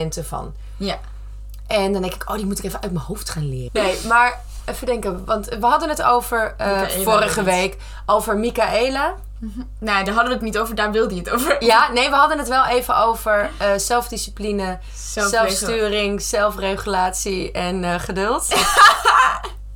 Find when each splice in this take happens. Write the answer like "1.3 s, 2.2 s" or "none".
3.7 s